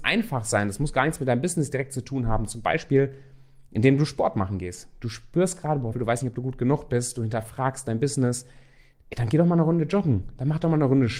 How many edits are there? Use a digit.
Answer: 1